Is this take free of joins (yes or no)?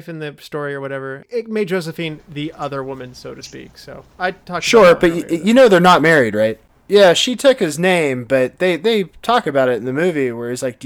yes